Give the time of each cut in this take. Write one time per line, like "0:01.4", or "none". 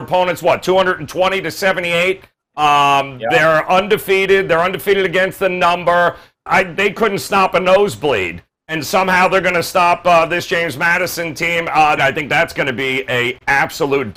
0:06.5
0:12.0